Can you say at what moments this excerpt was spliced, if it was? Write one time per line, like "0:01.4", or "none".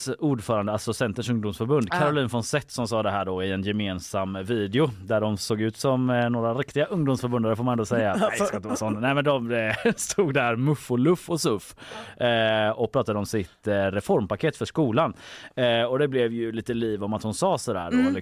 none